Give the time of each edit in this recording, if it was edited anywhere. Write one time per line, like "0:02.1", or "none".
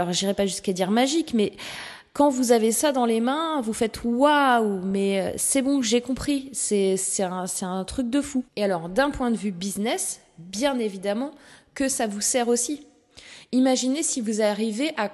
0:08.5